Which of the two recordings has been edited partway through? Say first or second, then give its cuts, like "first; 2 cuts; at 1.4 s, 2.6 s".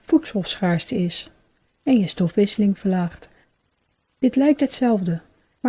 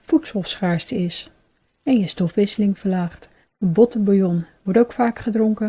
second; 1 cut; at 3.5 s